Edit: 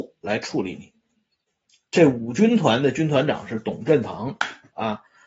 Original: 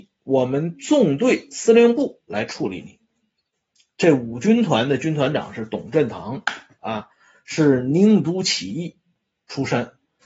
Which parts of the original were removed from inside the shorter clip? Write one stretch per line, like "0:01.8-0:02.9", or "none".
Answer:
none